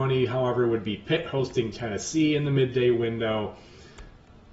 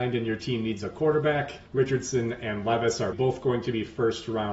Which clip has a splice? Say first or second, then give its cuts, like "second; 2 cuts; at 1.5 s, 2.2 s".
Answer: second; 2 cuts; at 1.7 s, 3.1 s